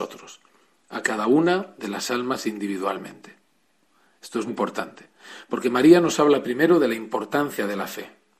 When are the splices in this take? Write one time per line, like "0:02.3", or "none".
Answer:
0:04.5